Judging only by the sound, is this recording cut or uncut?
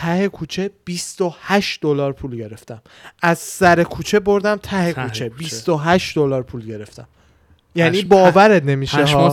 uncut